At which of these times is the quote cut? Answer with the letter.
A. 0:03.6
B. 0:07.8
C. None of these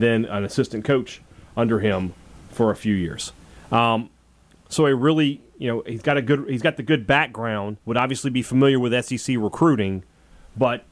B